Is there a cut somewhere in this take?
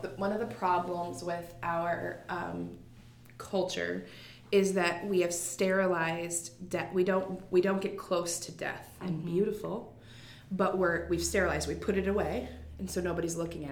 yes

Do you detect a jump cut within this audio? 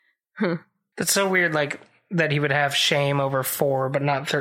yes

